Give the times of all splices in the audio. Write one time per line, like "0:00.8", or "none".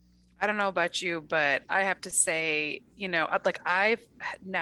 none

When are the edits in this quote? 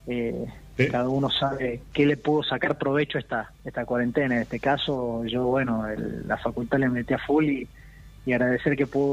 0:03.6

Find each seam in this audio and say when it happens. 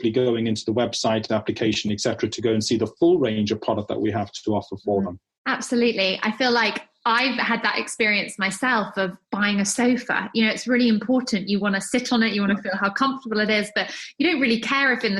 none

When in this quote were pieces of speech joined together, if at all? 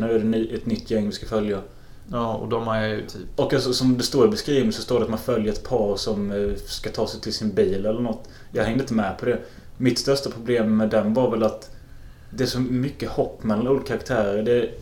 none

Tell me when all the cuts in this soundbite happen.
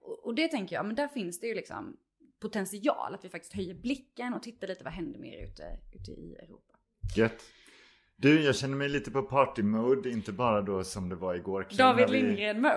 none

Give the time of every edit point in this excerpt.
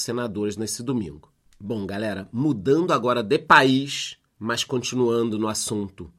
0:01.5
0:04.3

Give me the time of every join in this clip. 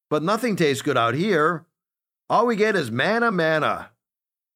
0:03.3

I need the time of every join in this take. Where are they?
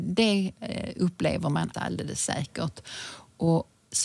0:01.7

